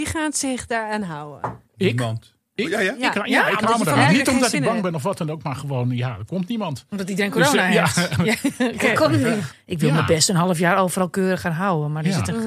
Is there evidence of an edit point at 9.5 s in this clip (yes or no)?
yes